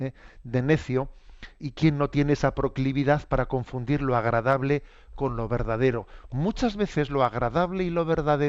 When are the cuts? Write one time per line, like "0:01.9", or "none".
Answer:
0:01.6